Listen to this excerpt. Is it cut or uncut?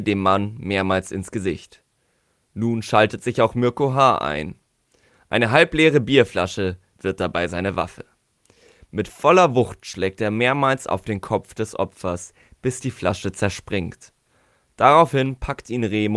cut